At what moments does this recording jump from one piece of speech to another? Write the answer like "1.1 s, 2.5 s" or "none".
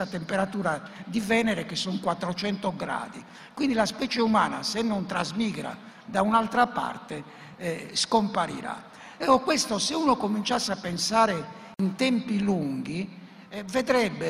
none